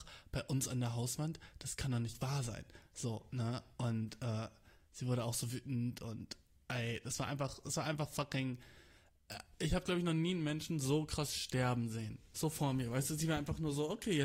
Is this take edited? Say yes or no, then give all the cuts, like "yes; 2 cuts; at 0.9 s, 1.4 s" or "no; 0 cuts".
no; 0 cuts